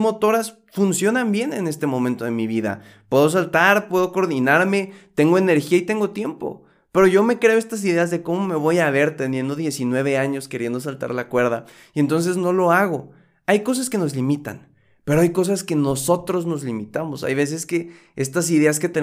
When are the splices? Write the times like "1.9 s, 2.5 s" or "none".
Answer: none